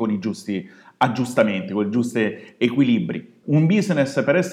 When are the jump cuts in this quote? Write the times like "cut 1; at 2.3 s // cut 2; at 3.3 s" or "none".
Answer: cut 1; at 3.4 s